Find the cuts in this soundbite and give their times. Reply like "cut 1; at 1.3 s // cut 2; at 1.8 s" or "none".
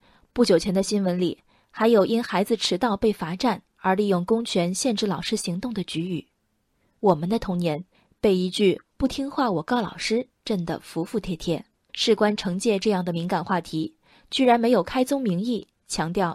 cut 1; at 11.9 s